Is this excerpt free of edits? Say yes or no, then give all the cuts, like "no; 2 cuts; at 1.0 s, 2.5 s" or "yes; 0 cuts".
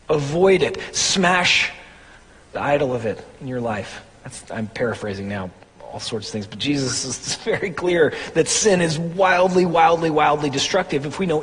yes; 0 cuts